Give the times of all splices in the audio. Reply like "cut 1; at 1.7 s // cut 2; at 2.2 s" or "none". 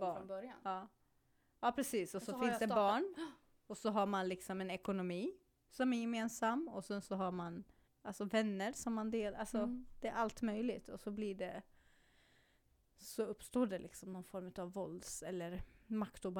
cut 1; at 7.9 s